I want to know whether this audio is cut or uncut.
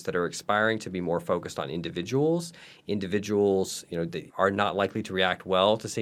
cut